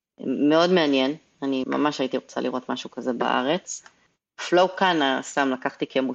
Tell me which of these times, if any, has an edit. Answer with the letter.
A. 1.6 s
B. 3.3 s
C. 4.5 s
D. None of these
A